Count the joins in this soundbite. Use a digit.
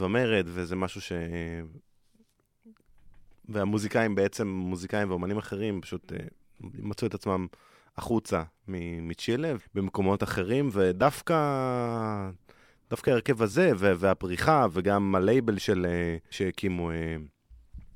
2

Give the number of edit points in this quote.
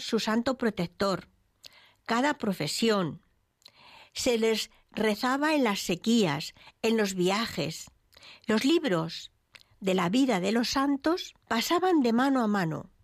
3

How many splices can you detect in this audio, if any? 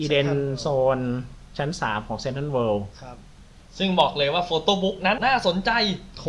1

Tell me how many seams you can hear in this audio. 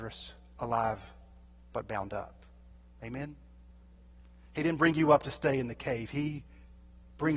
0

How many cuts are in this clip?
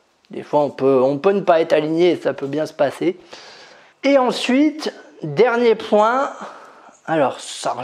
1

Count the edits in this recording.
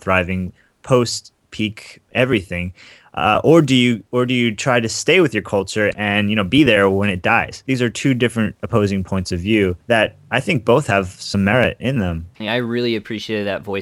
1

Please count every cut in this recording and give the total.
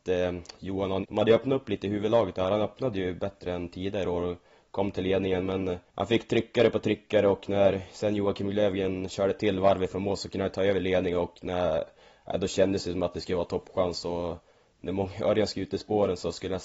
2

